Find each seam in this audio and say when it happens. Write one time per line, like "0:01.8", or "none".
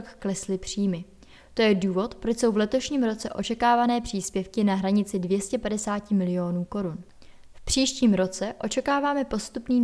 none